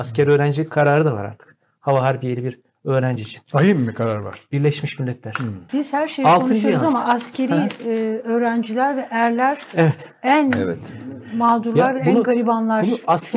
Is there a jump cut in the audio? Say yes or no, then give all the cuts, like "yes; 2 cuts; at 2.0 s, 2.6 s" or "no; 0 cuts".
yes; 1 cut; at 5.7 s